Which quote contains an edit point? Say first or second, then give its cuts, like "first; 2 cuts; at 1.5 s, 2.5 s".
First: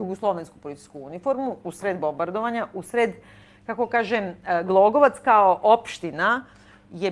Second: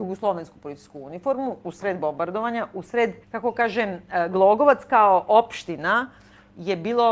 second; 1 cut; at 3.2 s